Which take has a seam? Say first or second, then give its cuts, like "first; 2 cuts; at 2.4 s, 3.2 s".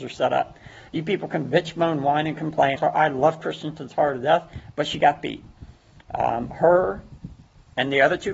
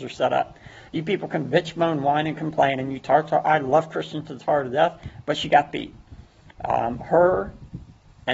first; 1 cut; at 2.8 s